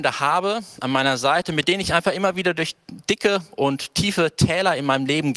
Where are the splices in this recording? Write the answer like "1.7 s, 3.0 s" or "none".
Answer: none

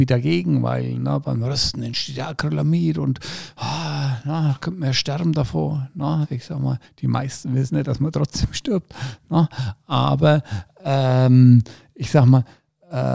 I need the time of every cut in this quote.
none

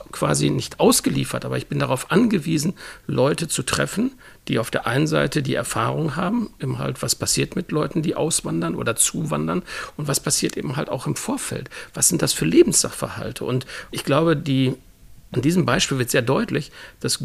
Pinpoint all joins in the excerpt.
13.9 s

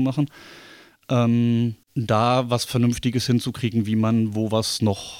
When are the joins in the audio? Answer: 1.8 s

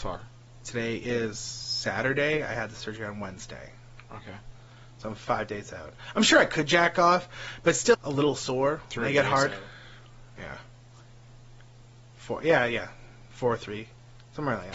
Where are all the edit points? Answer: 7.9 s

